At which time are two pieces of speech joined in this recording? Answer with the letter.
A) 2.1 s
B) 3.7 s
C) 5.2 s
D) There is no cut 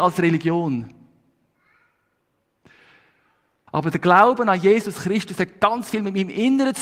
B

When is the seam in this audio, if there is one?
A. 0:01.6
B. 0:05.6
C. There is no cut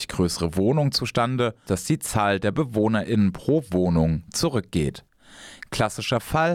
A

